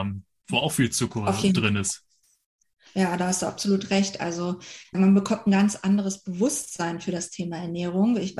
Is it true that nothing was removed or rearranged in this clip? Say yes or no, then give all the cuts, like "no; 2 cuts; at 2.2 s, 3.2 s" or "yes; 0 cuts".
yes; 0 cuts